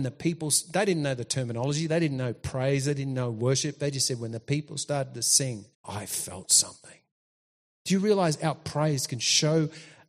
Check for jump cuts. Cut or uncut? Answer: cut